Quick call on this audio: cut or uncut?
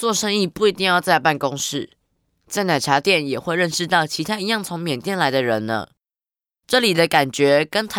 uncut